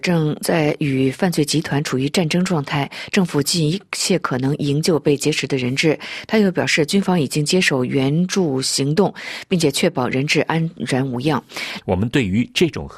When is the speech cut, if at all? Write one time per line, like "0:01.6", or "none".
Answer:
0:03.4
0:11.8

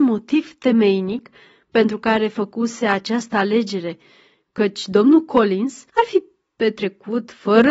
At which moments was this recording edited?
0:05.9

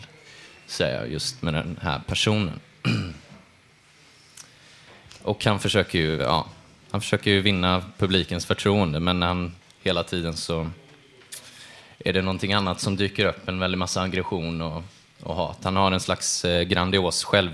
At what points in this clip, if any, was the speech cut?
none

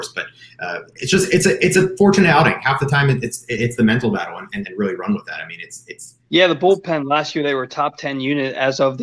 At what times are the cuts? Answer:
0:04.6
0:06.3

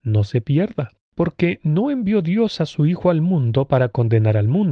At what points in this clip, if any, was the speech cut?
0:01.0

